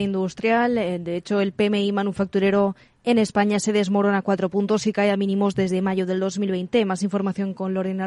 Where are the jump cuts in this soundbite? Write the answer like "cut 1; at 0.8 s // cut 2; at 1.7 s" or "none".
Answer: none